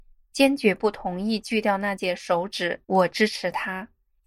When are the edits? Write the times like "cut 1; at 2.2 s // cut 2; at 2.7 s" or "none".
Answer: cut 1; at 2.8 s

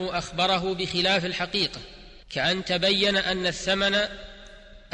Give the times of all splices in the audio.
cut 1; at 2.2 s

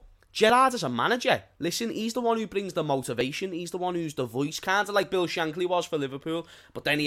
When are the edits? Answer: none

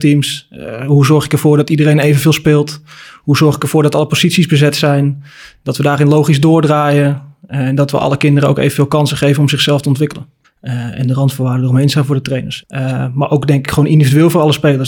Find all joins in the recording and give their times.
cut 1; at 10.4 s // cut 2; at 12.6 s

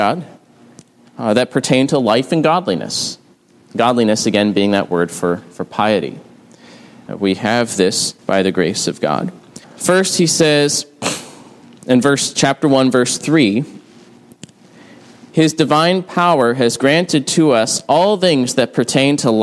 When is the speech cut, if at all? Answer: cut 1; at 7.1 s // cut 2; at 8.2 s // cut 3; at 9.6 s

